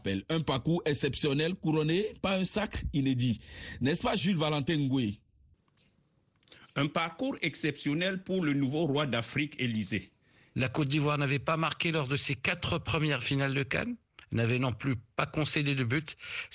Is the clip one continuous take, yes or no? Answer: no